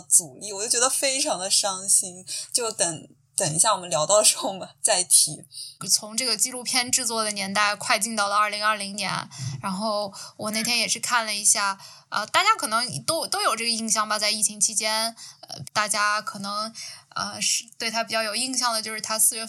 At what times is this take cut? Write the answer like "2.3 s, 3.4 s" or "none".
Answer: 5.8 s, 15.6 s